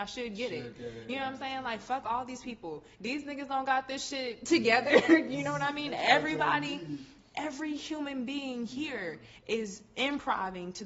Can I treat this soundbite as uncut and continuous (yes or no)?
yes